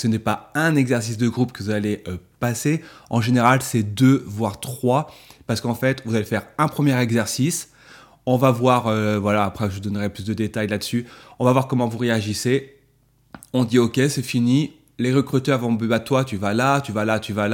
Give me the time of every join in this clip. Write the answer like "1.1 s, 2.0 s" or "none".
none